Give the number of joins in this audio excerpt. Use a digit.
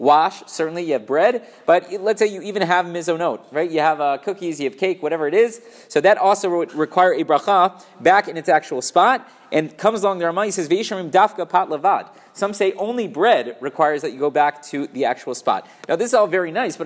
0